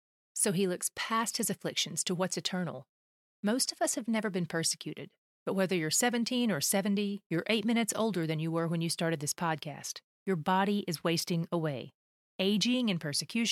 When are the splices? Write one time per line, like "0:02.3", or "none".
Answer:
0:12.3